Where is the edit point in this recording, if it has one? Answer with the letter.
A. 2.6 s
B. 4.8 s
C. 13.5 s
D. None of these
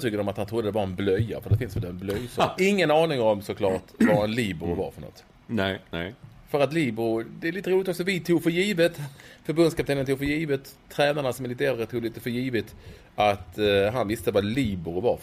A